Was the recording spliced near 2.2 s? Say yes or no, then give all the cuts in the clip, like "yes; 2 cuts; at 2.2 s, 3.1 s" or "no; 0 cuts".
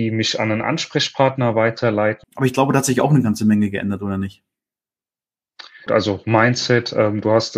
yes; 2 cuts; at 2.2 s, 5.9 s